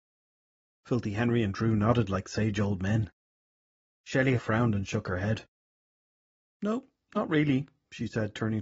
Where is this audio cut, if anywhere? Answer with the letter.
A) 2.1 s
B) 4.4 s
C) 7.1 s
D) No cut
B